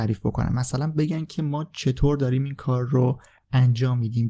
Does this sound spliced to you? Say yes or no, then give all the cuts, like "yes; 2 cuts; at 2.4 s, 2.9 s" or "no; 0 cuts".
no; 0 cuts